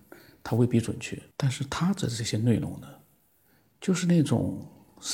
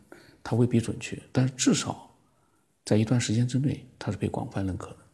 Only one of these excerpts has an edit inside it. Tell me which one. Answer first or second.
first